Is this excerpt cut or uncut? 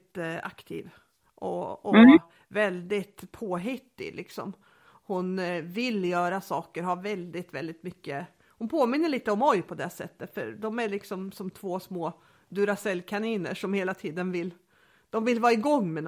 uncut